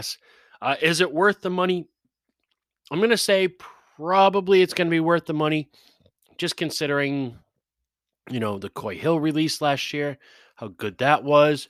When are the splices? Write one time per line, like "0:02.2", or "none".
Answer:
none